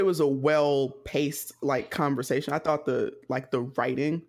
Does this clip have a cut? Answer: no; 0 cuts

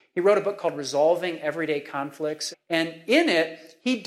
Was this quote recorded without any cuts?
no; 1 cut; at 2.5 s

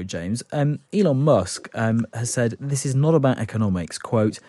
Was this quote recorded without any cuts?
yes; 0 cuts

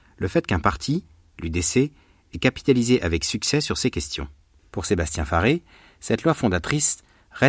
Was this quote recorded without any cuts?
no; 1 cut; at 4.6 s

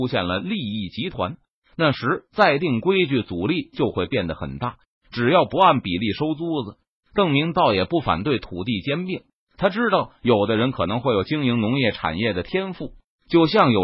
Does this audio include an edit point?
no; 0 cuts

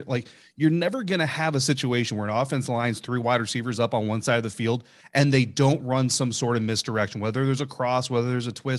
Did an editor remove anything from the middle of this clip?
no; 0 cuts

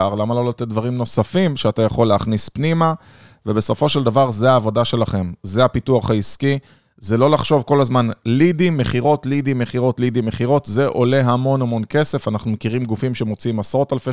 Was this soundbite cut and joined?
no; 0 cuts

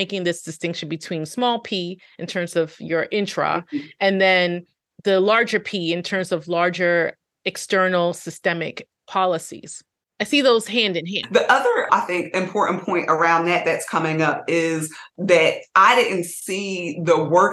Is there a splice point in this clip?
no; 0 cuts

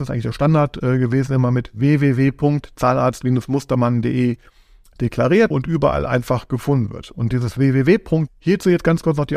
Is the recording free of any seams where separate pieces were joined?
no; 2 cuts; at 5.5 s, 8.3 s

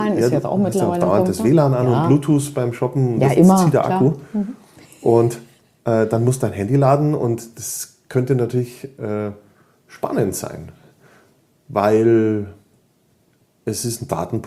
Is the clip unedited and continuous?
yes; 0 cuts

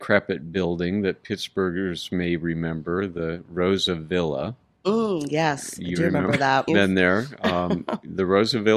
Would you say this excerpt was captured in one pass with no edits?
no; 1 cut; at 6.7 s

